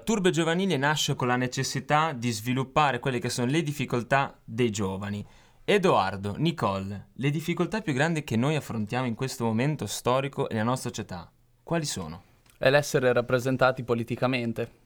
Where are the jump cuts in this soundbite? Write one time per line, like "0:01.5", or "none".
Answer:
0:01.2